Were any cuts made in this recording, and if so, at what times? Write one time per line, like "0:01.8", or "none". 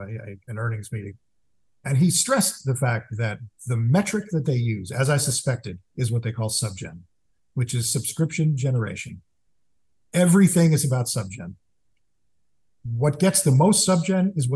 none